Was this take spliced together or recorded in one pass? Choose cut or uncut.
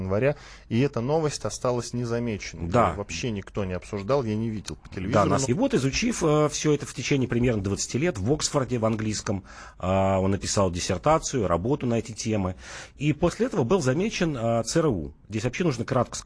cut